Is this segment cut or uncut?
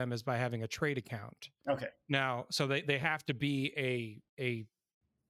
uncut